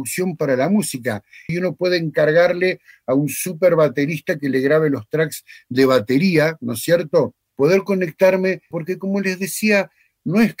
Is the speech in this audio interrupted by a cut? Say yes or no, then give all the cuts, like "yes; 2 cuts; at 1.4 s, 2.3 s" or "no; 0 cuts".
yes; 3 cuts; at 1.5 s, 7.5 s, 8.7 s